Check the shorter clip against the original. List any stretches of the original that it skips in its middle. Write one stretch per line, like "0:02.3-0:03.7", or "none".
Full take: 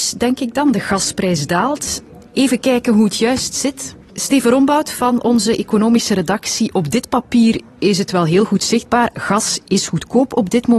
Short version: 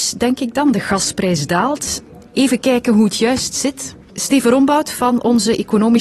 none